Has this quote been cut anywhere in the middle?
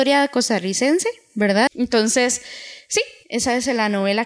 yes; 1 cut; at 1.7 s

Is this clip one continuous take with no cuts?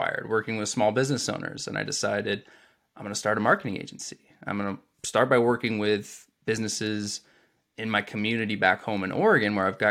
yes; 0 cuts

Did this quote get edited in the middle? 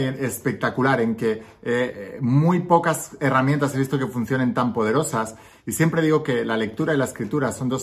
no; 0 cuts

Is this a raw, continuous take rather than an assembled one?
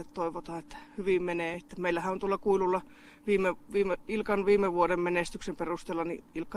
yes; 0 cuts

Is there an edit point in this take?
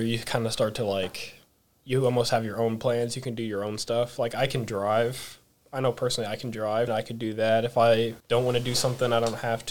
yes; 2 cuts; at 6.9 s, 8.2 s

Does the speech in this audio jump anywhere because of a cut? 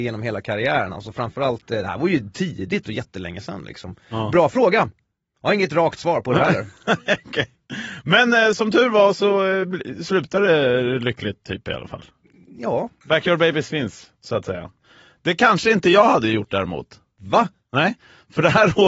no; 0 cuts

